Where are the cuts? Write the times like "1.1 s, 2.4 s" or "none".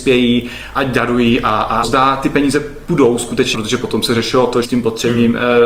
1.8 s, 3.5 s, 4.6 s